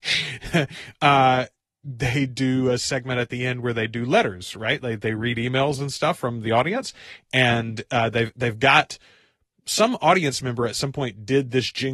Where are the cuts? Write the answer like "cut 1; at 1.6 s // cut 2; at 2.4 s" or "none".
none